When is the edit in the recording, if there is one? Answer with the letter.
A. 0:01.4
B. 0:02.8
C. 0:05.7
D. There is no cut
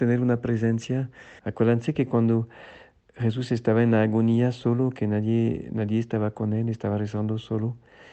A